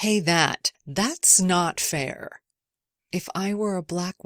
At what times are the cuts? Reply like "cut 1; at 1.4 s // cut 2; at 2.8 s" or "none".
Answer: cut 1; at 3.0 s